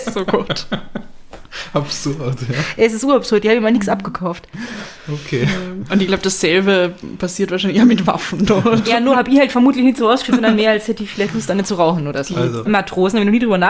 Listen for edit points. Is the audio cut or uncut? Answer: cut